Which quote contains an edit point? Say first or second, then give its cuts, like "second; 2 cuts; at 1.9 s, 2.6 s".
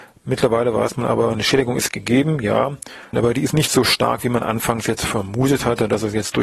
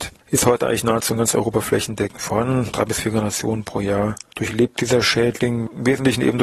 first; 1 cut; at 3.1 s